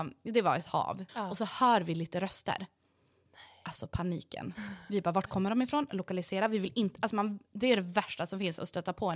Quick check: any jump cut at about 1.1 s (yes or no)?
yes